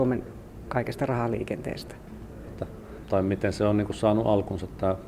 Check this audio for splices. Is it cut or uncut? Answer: cut